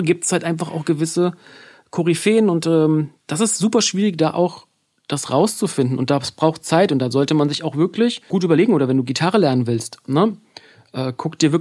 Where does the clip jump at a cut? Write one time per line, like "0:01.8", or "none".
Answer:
none